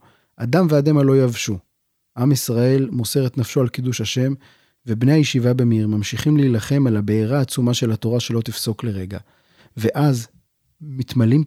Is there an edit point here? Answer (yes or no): no